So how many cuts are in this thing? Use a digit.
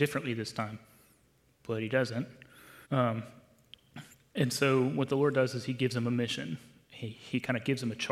1